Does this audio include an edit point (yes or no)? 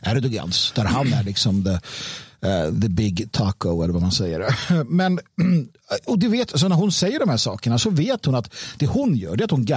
no